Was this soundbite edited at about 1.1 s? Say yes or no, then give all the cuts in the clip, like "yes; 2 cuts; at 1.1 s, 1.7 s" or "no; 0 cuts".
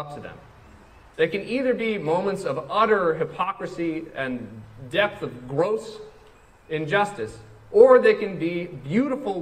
yes; 1 cut; at 1.1 s